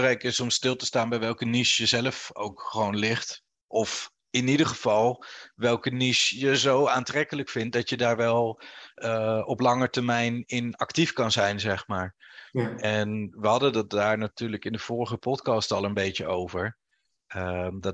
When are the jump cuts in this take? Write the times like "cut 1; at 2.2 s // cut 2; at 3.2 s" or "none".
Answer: none

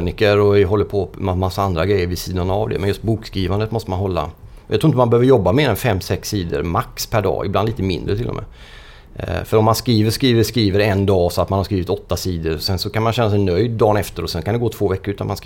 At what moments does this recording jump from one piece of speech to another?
none

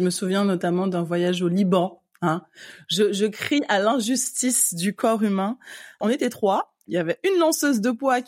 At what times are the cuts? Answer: none

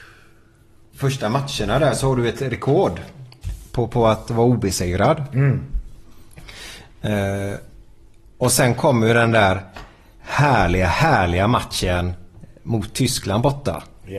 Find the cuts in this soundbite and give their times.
cut 1; at 0.9 s

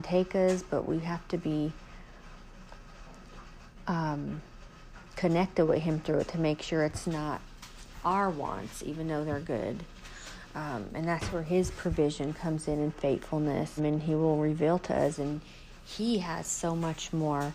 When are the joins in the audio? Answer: cut 1; at 13.8 s

